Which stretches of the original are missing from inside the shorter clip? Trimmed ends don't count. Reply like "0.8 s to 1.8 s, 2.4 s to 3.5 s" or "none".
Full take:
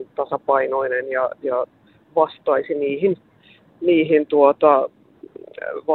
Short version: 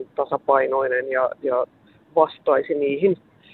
none